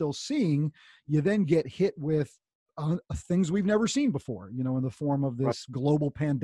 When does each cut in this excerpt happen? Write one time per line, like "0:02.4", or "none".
none